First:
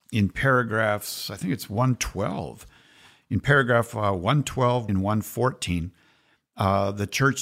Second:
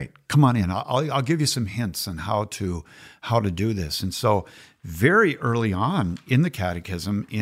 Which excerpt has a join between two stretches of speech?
first; 1 cut; at 4.9 s

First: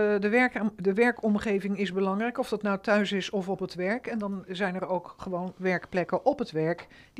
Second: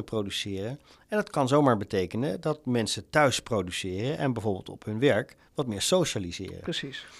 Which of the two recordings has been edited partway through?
first; 1 cut; at 4.5 s

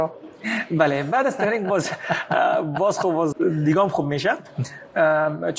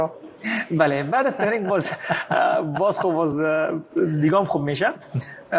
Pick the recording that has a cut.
first; 1 cut; at 3.3 s

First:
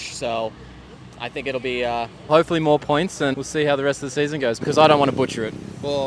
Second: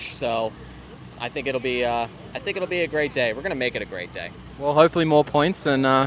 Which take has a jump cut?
first; 3 cuts; at 2.3 s, 3.3 s, 4.6 s

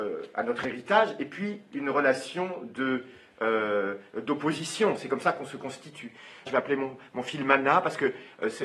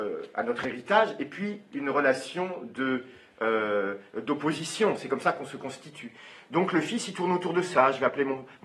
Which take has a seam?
first; 1 cut; at 6.5 s

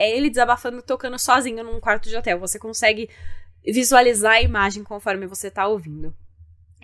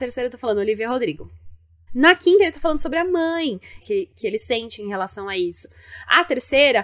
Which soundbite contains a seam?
second; 2 cuts; at 1.9 s, 3.8 s

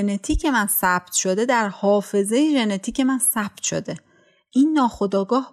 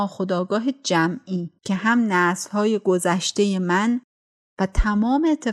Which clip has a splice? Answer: second; 1 cut; at 1.6 s

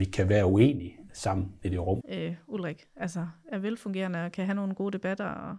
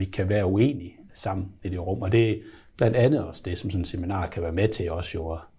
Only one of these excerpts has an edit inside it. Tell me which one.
first; 1 cut; at 2.0 s

